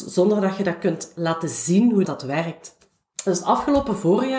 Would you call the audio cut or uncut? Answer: cut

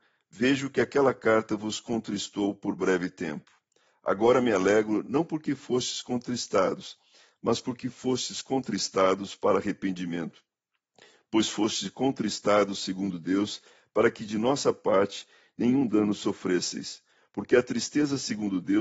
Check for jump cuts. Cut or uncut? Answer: uncut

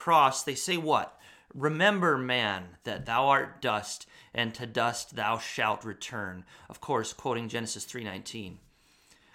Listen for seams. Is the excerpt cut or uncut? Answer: uncut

